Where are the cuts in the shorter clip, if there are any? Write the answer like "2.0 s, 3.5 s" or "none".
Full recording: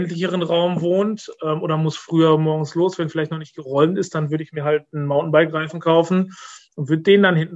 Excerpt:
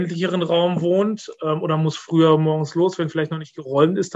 none